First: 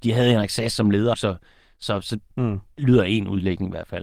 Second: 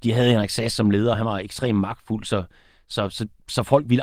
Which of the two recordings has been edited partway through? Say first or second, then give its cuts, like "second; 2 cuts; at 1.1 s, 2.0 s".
first; 2 cuts; at 1.1 s, 2.3 s